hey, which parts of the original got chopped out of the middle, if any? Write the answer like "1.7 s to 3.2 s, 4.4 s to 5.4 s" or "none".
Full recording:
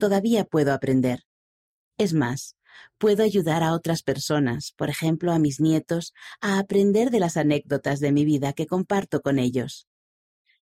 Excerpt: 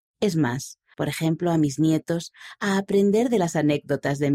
2.7 s to 4.7 s